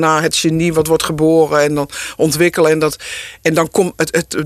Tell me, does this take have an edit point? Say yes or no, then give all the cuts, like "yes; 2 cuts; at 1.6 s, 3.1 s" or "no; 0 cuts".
no; 0 cuts